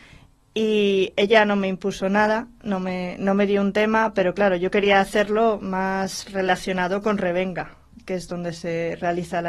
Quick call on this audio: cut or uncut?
uncut